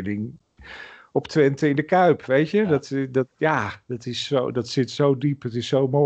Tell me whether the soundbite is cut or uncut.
uncut